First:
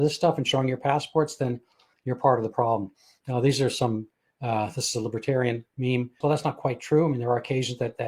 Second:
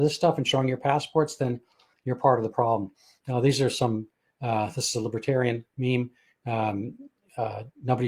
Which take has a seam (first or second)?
first